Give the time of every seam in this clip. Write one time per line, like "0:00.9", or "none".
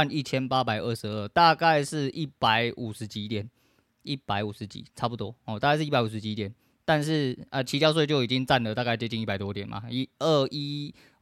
none

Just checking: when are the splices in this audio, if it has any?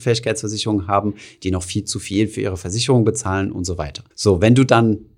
0:04.1

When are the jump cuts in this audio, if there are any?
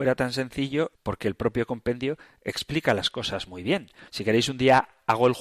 0:00.9
0:04.1

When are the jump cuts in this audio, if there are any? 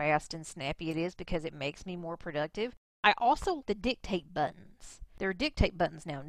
0:03.6

